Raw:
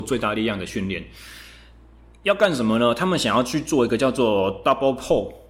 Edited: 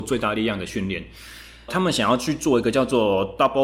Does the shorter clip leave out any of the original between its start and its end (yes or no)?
yes